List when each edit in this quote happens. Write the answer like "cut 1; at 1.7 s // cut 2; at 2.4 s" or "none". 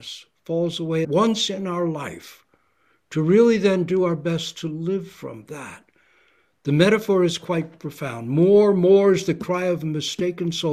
cut 1; at 1.0 s